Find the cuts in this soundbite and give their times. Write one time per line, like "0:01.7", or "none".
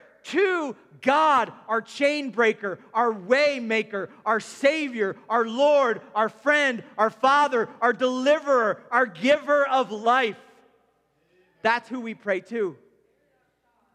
none